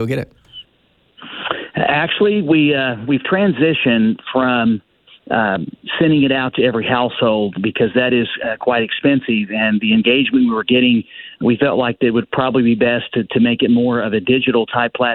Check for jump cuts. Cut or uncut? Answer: uncut